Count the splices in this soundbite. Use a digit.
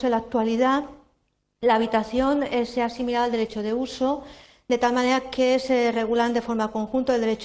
0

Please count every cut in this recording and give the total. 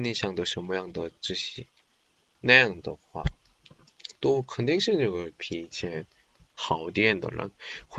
0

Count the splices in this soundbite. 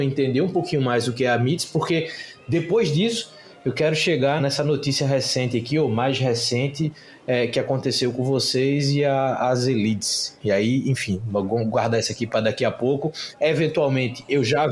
2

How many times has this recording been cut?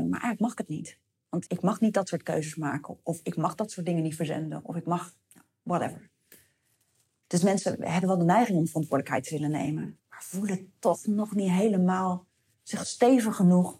3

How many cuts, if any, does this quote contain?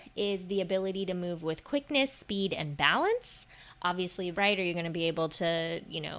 1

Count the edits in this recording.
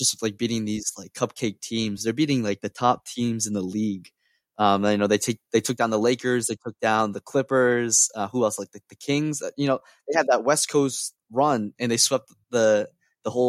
0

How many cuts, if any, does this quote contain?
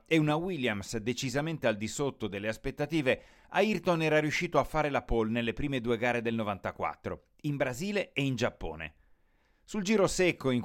0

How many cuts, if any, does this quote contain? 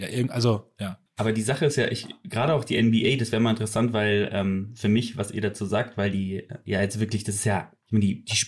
1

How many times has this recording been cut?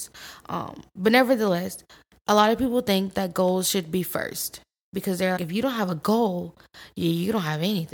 1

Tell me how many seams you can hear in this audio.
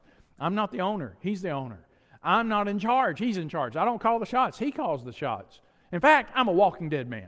0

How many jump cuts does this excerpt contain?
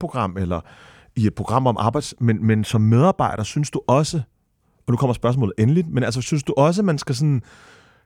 0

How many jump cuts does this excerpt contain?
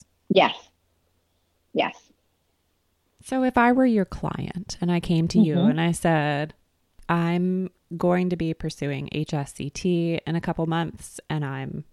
0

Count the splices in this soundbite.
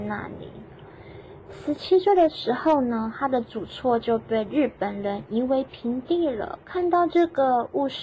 1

